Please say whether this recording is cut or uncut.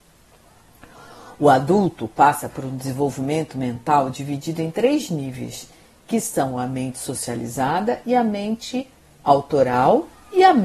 uncut